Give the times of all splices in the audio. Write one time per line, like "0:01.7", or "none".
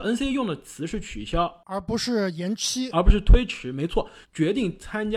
0:04.2